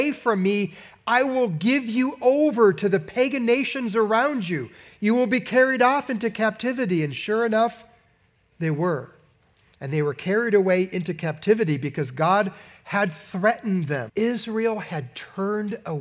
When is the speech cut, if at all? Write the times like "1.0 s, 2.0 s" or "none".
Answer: 9.7 s, 14.1 s

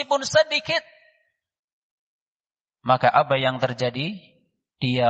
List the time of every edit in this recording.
none

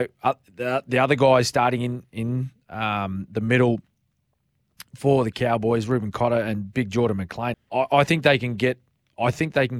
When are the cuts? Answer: 7.5 s

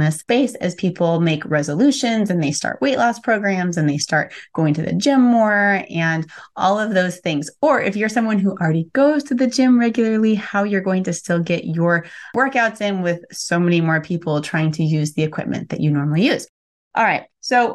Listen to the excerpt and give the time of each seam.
none

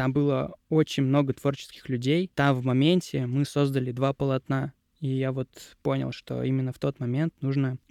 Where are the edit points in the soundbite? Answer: none

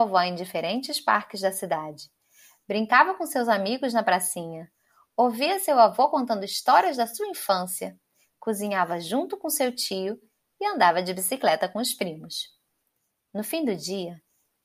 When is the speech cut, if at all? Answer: none

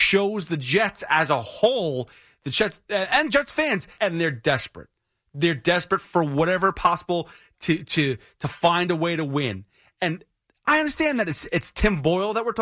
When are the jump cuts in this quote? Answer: 4.0 s

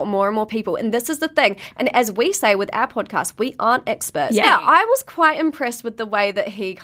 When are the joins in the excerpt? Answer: 4.4 s

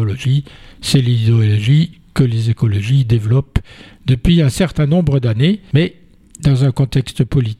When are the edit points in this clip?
none

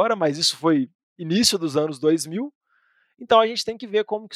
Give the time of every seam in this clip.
none

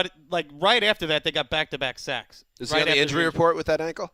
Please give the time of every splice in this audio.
none

